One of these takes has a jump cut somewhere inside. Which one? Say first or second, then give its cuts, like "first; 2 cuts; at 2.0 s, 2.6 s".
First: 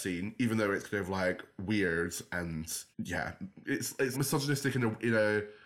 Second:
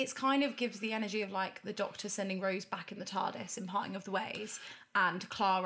first; 2 cuts; at 2.9 s, 4.1 s